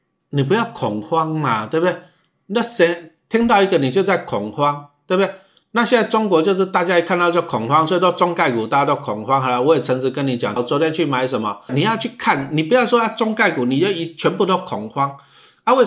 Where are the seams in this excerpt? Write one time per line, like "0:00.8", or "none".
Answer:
0:10.6
0:11.7